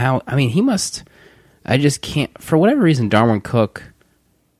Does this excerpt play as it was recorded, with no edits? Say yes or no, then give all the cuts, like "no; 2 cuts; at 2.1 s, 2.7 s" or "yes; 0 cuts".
yes; 0 cuts